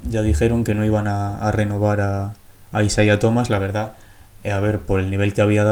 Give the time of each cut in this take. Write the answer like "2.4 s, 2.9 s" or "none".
none